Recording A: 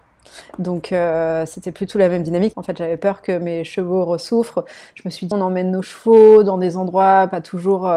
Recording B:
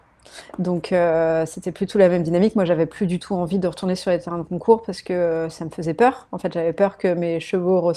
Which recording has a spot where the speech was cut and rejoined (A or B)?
A